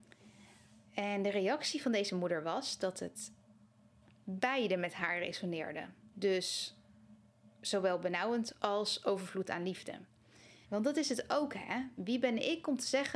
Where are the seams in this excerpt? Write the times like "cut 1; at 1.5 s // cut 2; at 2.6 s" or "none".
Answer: cut 1; at 6.1 s // cut 2; at 10.6 s